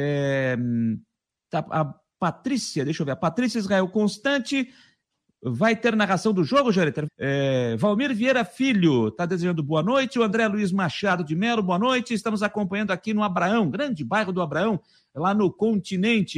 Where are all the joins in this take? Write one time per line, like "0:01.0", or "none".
0:07.1